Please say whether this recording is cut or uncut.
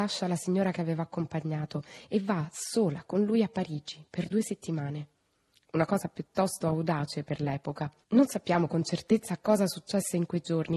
cut